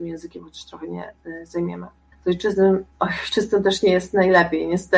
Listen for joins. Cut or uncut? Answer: cut